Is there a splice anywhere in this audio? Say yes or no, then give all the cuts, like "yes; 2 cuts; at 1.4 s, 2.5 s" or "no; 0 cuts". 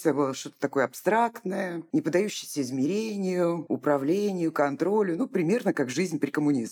no; 0 cuts